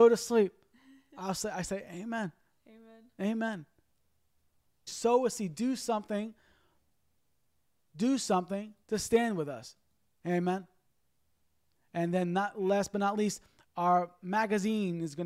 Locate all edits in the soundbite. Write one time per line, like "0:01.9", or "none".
0:04.9